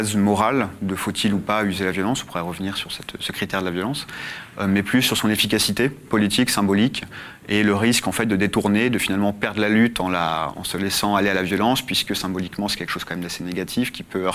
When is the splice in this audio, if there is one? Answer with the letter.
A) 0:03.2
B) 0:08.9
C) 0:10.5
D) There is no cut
C